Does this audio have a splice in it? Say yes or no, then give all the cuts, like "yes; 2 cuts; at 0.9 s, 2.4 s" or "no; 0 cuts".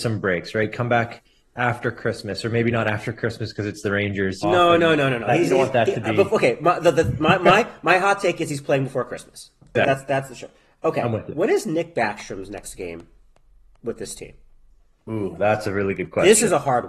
yes; 2 cuts; at 4.4 s, 9.8 s